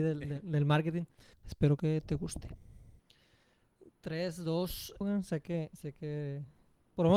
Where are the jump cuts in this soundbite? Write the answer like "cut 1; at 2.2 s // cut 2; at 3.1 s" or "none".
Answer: cut 1; at 1.3 s // cut 2; at 5.0 s